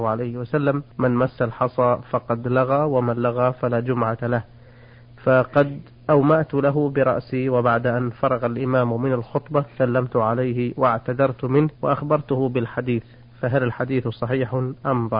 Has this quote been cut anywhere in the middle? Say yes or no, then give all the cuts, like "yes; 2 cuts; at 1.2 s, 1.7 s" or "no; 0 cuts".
yes; 2 cuts; at 0.9 s, 11.7 s